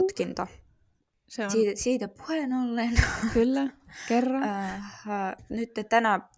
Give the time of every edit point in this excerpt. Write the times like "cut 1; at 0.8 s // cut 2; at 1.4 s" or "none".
cut 1; at 1.1 s